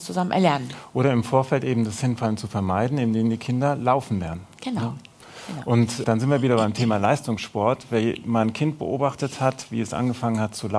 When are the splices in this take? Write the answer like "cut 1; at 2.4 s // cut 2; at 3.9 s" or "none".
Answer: cut 1; at 6.0 s